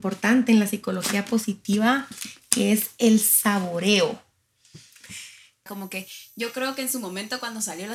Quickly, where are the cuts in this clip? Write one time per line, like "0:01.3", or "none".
0:05.7